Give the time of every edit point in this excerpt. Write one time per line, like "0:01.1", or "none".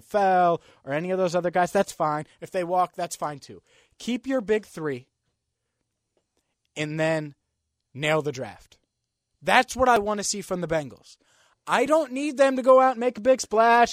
none